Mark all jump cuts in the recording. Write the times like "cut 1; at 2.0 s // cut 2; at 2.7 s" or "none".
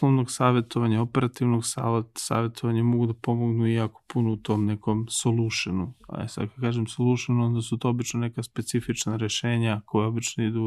none